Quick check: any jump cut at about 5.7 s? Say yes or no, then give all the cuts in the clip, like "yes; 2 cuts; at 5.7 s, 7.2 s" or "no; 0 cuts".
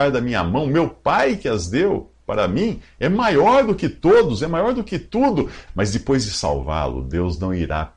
yes; 1 cut; at 5.7 s